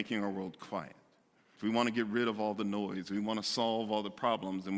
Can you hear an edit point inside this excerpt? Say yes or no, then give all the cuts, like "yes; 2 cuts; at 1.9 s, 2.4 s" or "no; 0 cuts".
yes; 1 cut; at 1.6 s